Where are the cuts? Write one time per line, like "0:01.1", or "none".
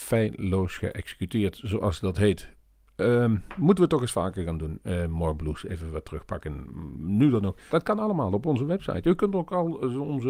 0:07.7